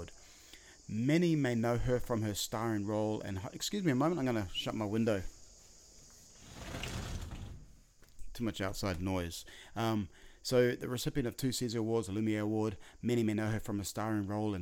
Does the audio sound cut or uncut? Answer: uncut